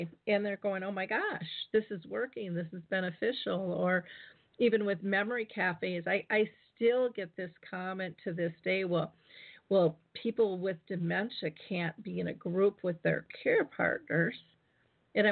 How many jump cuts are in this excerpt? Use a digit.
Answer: 0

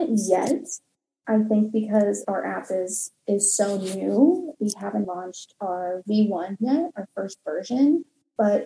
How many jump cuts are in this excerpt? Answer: 1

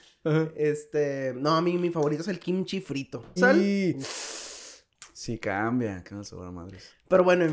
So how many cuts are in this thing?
1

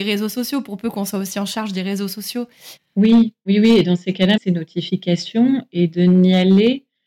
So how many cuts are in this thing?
2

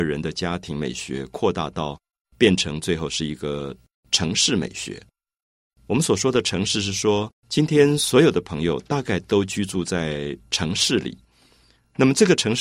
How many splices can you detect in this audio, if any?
2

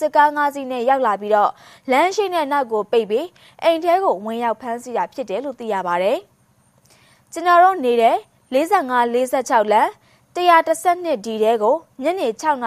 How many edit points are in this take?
0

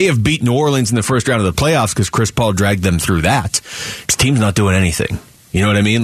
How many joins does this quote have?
1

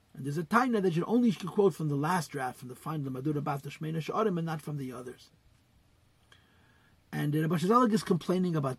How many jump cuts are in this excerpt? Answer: 0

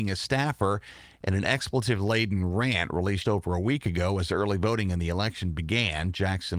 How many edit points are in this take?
1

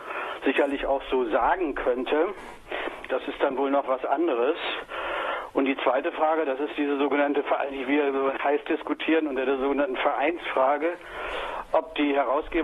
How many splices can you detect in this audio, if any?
1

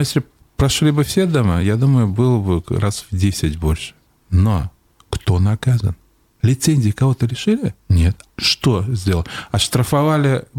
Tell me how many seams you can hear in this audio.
1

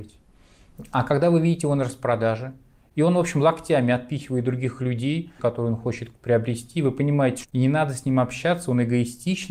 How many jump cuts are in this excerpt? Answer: 2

